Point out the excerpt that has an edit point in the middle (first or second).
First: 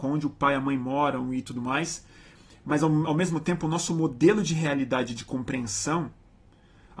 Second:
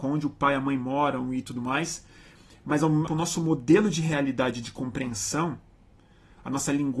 second